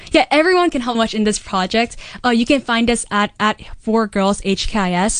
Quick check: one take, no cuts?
no; 1 cut; at 0.9 s

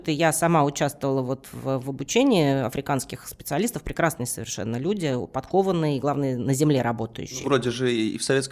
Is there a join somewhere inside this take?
no; 0 cuts

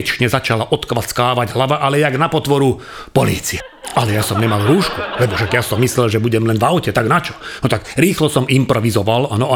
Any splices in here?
no; 0 cuts

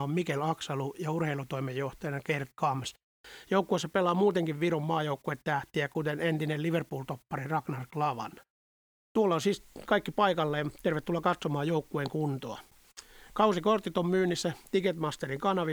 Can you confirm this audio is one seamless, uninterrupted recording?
yes; 0 cuts

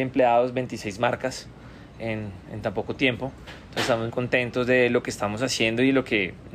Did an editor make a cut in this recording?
yes; 1 cut; at 4.1 s

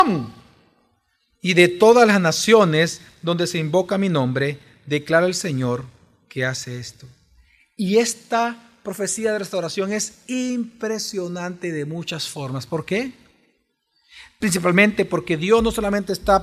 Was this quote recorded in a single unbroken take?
yes; 0 cuts

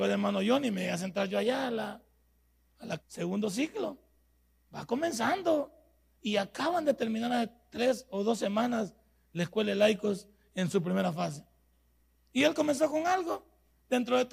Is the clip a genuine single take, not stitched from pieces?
no; 1 cut; at 3.0 s

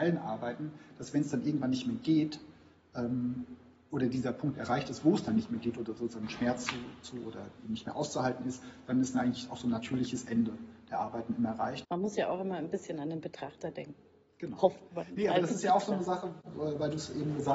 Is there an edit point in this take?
no; 0 cuts

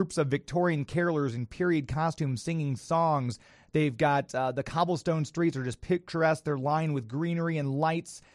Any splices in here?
no; 0 cuts

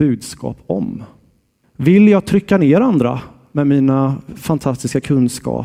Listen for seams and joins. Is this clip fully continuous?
no; 1 cut; at 1.6 s

